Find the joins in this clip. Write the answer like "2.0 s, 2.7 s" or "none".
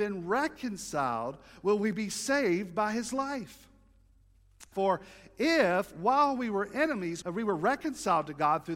4.7 s, 7.2 s